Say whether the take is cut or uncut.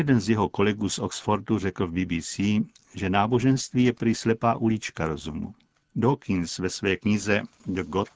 cut